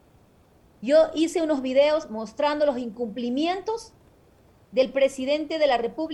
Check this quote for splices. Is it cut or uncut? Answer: uncut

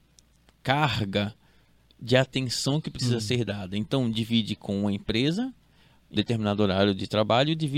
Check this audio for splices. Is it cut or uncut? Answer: cut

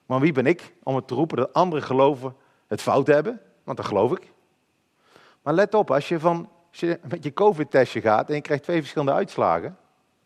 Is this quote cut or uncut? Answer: uncut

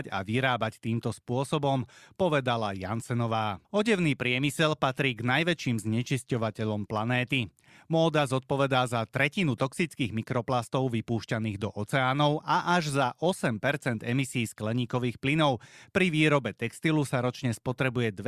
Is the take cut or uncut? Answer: cut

